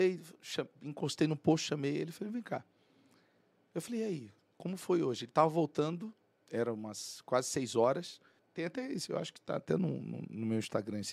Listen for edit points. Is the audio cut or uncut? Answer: cut